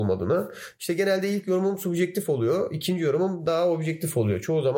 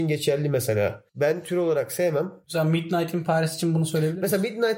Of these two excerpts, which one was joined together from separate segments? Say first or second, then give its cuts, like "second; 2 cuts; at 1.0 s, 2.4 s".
second; 2 cuts; at 1.1 s, 2.4 s